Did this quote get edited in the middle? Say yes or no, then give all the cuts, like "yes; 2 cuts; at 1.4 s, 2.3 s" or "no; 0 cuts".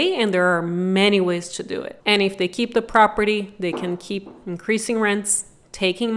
yes; 1 cut; at 2.0 s